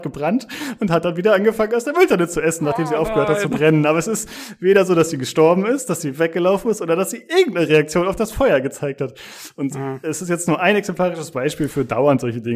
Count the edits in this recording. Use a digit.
0